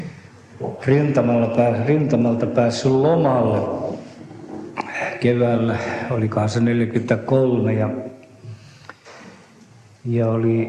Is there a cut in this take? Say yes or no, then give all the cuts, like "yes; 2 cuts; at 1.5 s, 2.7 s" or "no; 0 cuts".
no; 0 cuts